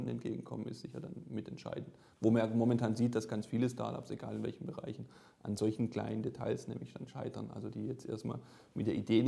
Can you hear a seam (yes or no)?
no